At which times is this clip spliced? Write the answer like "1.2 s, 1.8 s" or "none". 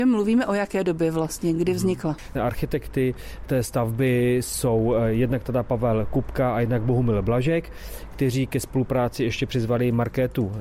2.3 s